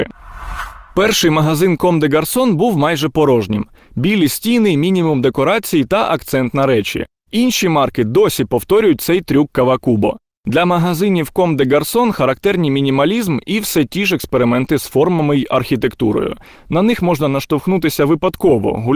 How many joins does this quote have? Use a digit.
1